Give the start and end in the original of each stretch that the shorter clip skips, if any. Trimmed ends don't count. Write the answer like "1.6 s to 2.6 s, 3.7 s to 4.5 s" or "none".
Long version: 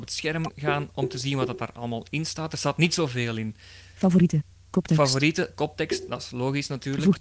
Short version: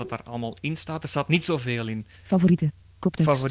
3.7 s to 3.9 s